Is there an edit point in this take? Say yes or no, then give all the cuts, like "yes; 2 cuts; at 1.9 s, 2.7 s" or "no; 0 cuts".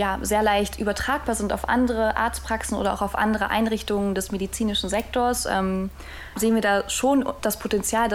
no; 0 cuts